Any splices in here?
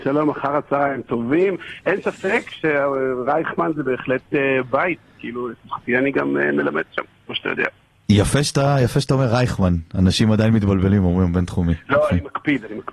no; 0 cuts

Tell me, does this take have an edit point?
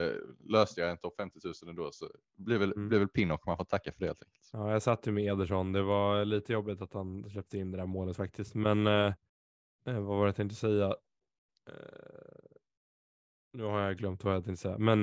no; 0 cuts

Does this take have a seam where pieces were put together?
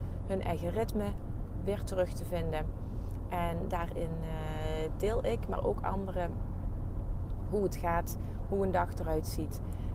no; 0 cuts

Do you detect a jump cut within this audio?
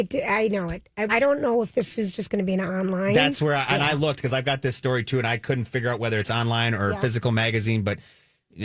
yes; 1 cut; at 1.1 s

